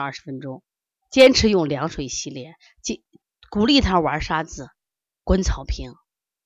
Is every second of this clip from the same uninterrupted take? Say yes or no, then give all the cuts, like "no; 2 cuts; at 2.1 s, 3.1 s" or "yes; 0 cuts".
no; 1 cut; at 1.0 s